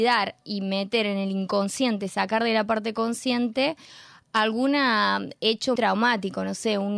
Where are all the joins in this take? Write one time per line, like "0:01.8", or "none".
0:05.8